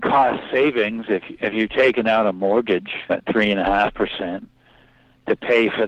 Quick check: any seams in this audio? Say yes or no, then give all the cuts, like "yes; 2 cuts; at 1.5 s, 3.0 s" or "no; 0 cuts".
yes; 1 cut; at 3.1 s